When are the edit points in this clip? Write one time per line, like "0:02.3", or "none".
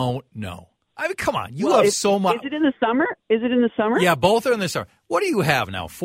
none